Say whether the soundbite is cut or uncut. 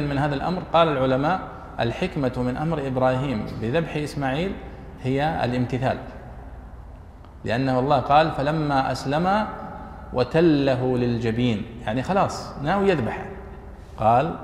uncut